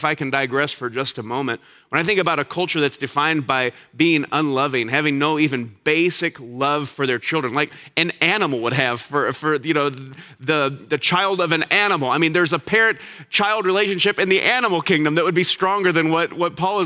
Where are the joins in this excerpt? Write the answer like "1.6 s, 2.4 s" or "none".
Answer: none